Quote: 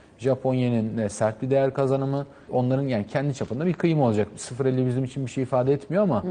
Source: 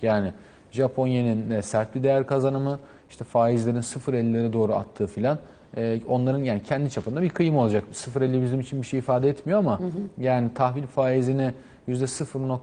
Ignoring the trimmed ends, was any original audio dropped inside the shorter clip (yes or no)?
yes